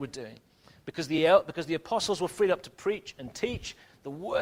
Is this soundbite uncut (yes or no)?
yes